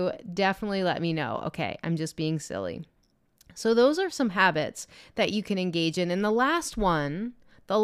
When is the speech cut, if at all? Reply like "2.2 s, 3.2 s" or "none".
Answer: none